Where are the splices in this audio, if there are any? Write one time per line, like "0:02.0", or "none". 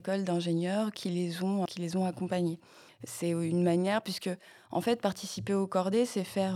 0:01.7